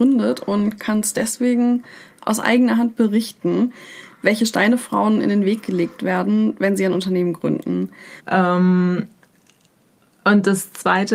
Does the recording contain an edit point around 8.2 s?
yes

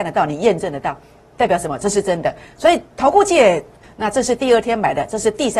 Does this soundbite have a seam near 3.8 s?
yes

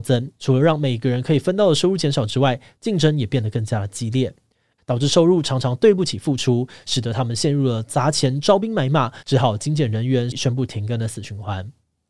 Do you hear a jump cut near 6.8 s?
no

